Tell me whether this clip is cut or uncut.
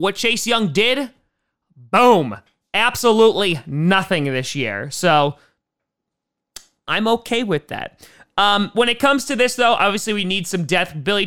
uncut